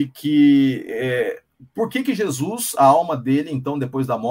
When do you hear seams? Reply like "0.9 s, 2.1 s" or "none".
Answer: none